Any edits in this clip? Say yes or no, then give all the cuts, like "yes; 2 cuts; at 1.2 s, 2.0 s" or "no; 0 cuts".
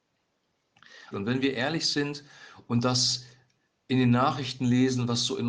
yes; 1 cut; at 1.1 s